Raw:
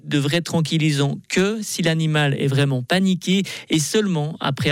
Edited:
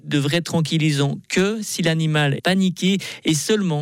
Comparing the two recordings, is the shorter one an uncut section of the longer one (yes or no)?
no